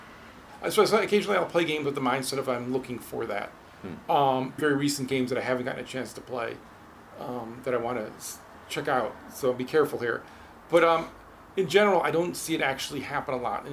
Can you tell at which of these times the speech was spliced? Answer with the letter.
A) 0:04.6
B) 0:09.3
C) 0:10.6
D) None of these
A